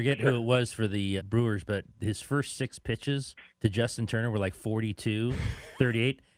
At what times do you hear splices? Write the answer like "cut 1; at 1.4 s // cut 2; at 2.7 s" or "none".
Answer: cut 1; at 1.2 s // cut 2; at 3.5 s